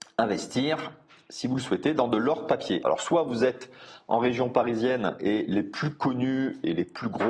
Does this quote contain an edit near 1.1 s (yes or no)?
no